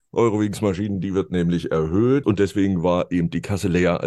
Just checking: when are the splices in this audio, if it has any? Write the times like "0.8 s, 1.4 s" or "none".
2.2 s